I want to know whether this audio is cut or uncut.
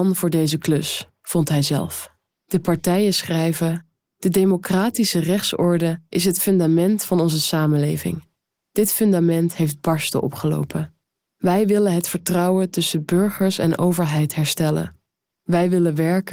cut